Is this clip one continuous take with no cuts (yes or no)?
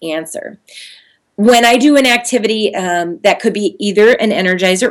yes